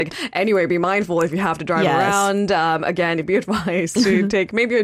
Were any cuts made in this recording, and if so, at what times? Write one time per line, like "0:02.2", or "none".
0:03.2